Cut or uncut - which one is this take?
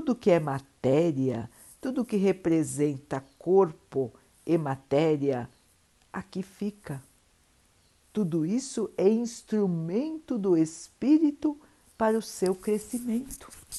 uncut